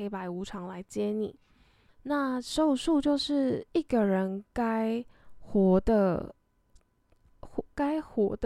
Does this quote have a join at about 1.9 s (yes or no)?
yes